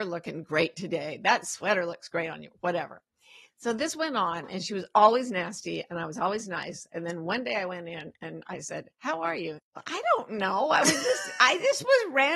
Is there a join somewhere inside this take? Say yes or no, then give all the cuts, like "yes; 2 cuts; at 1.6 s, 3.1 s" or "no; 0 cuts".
yes; 1 cut; at 9.6 s